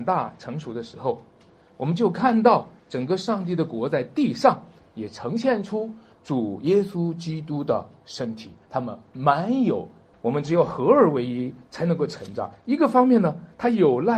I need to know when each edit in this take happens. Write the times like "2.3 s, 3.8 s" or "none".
2.8 s, 10.1 s